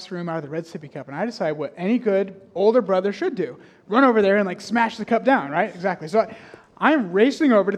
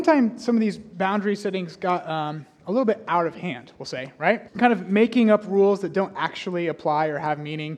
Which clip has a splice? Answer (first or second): second